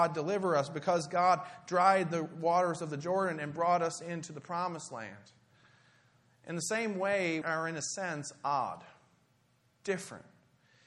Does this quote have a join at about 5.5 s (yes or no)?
no